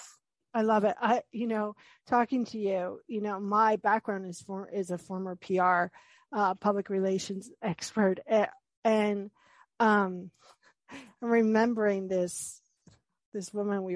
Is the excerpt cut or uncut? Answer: uncut